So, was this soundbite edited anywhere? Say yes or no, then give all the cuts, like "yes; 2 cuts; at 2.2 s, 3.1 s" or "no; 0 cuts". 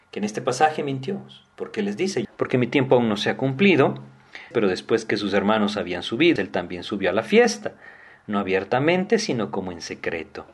yes; 3 cuts; at 2.2 s, 4.5 s, 6.4 s